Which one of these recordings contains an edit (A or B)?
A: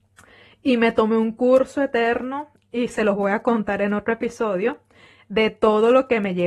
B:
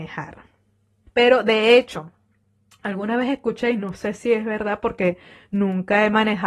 B